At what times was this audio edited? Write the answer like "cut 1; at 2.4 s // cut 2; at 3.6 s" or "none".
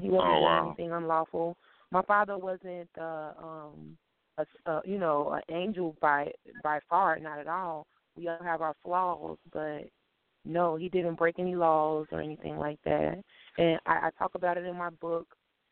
none

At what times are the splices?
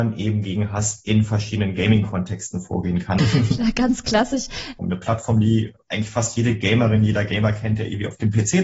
cut 1; at 3.2 s // cut 2; at 4.8 s

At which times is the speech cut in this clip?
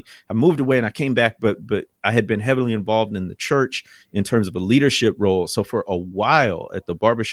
none

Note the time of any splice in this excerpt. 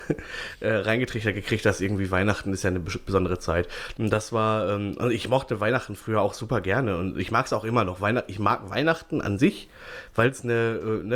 cut 1; at 3.9 s

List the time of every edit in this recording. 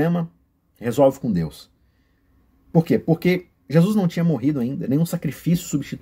none

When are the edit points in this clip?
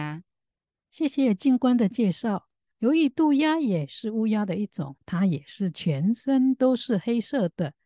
cut 1; at 5.0 s

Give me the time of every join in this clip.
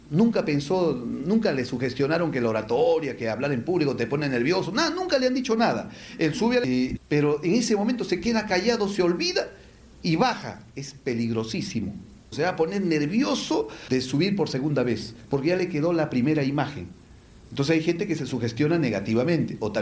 cut 1; at 7.0 s

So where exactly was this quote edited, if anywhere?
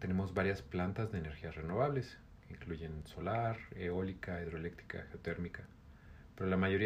none

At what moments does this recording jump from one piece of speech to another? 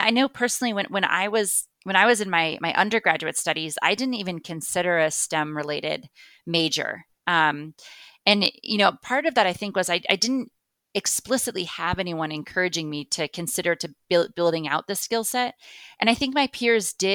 cut 1; at 1.7 s

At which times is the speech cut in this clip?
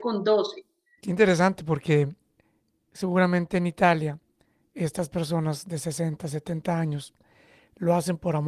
cut 1; at 1.0 s

